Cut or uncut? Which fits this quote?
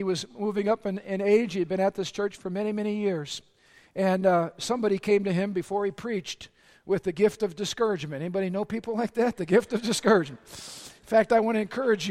uncut